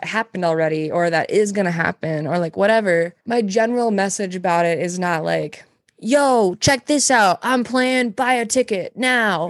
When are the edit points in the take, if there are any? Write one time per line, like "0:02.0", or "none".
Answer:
0:03.2